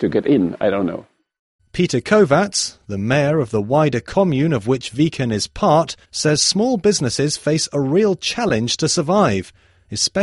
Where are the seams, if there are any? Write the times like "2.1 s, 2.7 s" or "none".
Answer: 1.6 s, 6.0 s